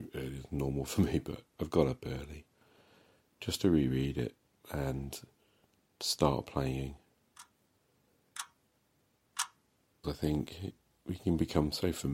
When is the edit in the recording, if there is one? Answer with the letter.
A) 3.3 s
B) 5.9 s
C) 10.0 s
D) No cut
C